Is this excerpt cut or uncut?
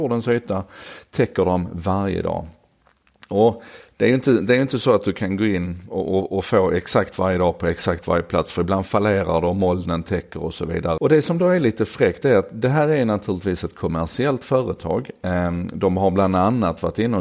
cut